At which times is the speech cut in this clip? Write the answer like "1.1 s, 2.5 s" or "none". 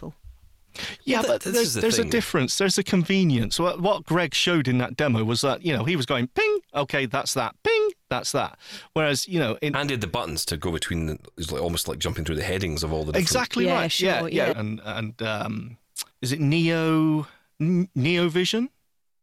14.5 s, 16.1 s